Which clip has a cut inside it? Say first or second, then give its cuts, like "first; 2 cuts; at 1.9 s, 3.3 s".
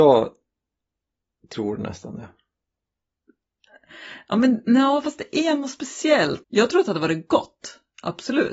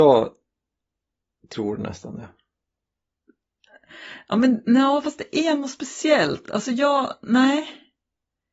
first; 1 cut; at 6.4 s